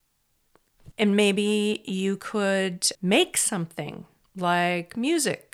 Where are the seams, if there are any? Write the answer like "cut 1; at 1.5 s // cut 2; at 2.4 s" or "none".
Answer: cut 1; at 0.9 s // cut 2; at 2.9 s